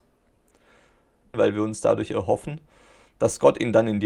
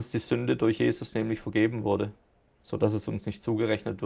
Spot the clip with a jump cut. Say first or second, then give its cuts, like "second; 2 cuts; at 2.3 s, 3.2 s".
first; 1 cut; at 1.3 s